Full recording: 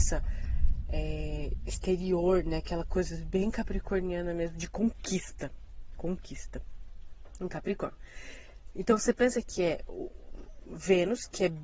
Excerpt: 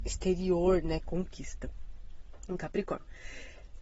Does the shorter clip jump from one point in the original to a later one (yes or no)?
yes